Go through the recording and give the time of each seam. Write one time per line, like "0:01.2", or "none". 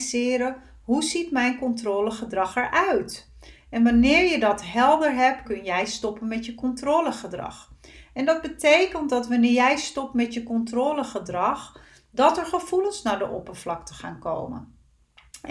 0:05.5